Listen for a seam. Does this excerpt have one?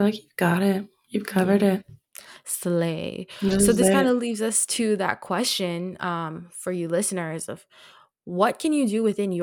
no; 0 cuts

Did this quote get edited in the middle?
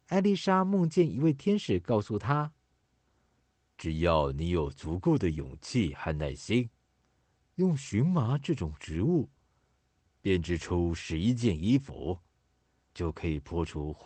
yes; 1 cut; at 12.9 s

